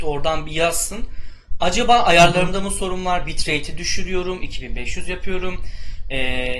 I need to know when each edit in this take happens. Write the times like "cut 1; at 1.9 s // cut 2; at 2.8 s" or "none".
cut 1; at 4.4 s